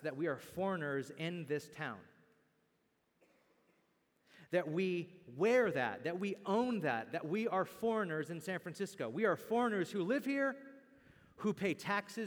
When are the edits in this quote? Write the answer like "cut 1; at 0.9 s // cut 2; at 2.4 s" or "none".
none